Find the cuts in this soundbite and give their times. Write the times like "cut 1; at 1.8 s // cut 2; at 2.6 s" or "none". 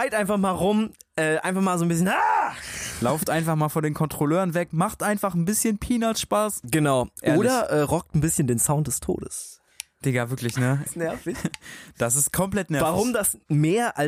cut 1; at 10.9 s